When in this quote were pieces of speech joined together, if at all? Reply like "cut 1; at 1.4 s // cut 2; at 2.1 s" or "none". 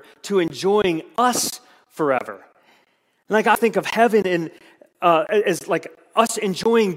cut 1; at 3.5 s